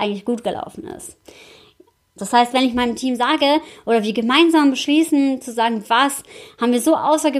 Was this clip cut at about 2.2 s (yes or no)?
yes